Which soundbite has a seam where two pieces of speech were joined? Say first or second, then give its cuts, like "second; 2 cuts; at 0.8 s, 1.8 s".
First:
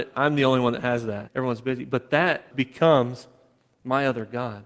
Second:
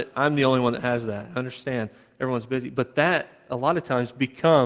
first; 2 cuts; at 1.3 s, 2.5 s